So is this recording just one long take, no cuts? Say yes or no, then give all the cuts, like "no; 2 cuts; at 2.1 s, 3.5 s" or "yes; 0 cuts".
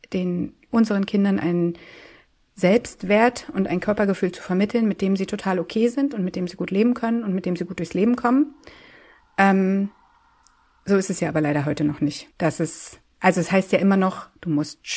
no; 1 cut; at 12.3 s